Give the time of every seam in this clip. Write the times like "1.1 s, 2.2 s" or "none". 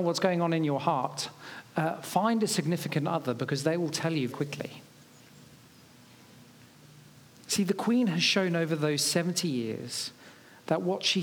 4.3 s

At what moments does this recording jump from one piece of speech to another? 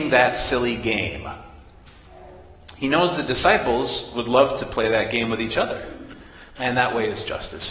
6.6 s

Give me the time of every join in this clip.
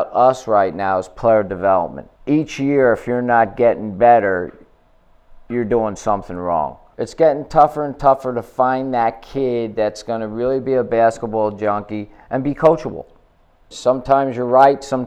2.2 s, 6.9 s, 13.7 s

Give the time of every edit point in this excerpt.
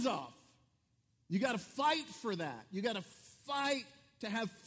none

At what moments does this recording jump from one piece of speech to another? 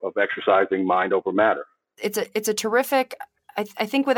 1.9 s

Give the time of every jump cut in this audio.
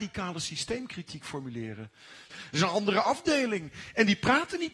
2.3 s

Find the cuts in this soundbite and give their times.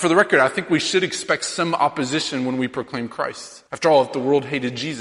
3.7 s

